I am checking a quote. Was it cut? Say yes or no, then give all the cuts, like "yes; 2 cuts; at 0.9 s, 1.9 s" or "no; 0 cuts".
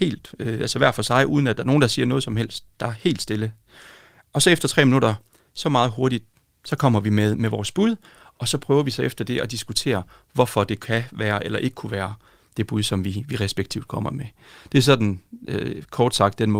no; 0 cuts